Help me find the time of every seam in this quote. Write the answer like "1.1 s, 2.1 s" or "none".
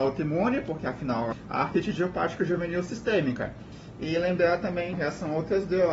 3.9 s